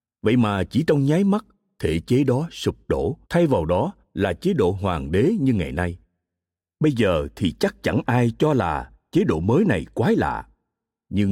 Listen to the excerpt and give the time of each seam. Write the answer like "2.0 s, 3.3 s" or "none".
3.2 s